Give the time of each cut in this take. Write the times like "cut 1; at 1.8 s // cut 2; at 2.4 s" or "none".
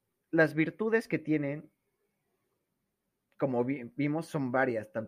none